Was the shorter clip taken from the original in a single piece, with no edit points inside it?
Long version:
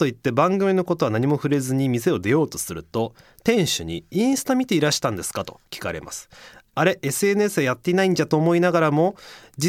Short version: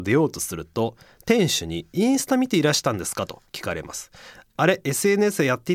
yes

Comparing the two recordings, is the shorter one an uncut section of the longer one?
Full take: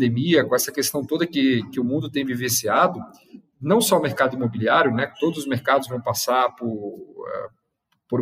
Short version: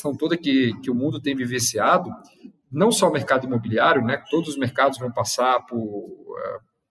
yes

